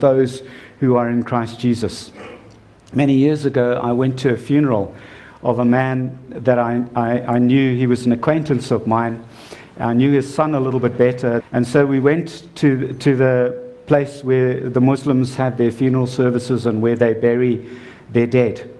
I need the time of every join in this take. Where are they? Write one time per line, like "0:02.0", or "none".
0:11.4